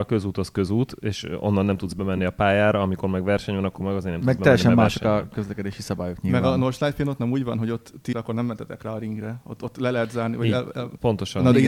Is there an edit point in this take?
yes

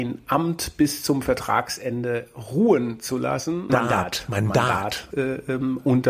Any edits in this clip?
yes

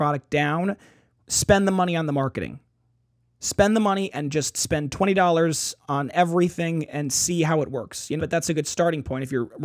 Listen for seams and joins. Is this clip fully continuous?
no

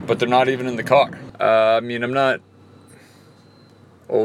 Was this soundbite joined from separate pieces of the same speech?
yes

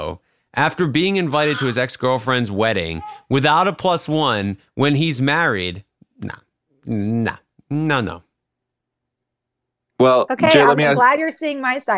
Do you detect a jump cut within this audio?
no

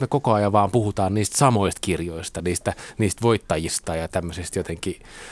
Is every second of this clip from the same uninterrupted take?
yes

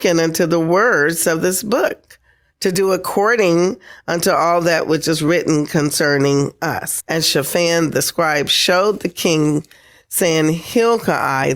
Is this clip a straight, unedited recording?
no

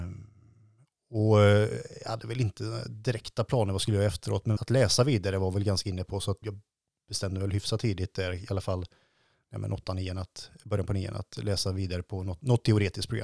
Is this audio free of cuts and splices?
no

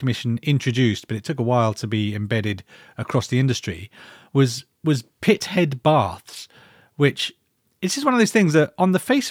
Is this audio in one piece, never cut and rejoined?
yes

